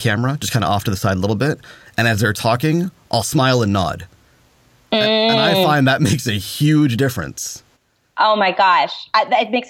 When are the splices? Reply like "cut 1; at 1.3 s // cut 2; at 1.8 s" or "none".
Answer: none